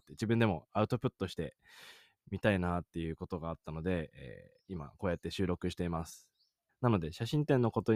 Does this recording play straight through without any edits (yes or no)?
no